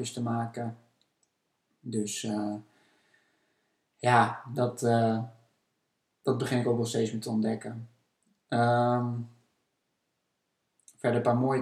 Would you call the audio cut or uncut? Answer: uncut